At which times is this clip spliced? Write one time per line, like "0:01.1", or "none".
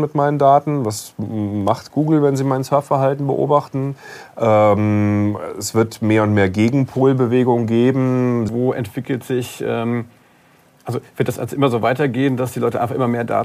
0:08.5